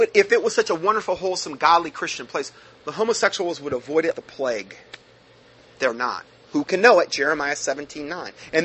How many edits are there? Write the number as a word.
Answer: two